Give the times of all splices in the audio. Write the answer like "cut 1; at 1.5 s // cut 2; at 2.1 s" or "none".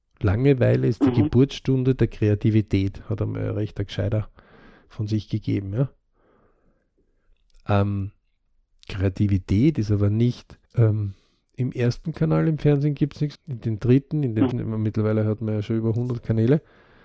cut 1; at 10.7 s // cut 2; at 13.4 s // cut 3; at 14.5 s